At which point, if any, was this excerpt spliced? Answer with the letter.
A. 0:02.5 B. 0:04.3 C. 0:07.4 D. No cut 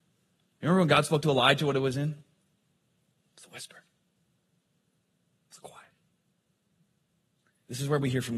D